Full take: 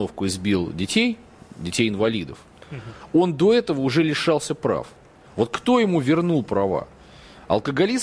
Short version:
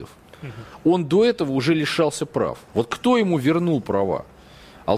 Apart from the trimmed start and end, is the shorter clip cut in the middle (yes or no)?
yes